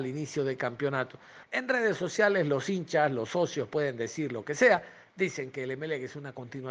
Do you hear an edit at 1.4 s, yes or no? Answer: yes